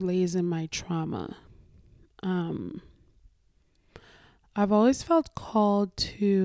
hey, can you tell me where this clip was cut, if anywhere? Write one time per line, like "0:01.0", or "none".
none